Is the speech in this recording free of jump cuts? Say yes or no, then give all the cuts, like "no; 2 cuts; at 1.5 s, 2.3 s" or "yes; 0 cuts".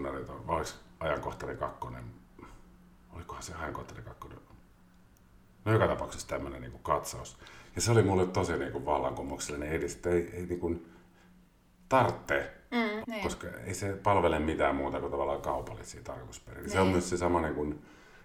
no; 2 cuts; at 7.7 s, 13.0 s